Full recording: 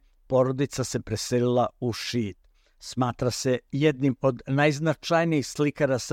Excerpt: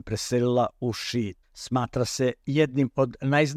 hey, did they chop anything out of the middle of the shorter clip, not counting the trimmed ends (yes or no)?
yes